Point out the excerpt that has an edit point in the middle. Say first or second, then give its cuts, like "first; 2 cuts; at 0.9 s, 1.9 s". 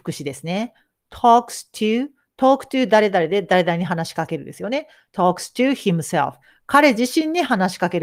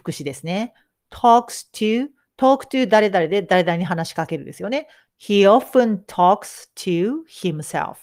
second; 1 cut; at 5.1 s